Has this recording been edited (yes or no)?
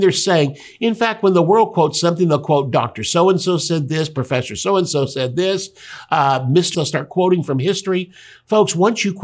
yes